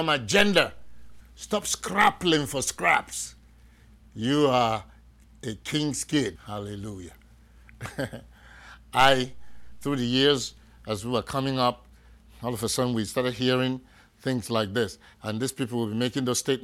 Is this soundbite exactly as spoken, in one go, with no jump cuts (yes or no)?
no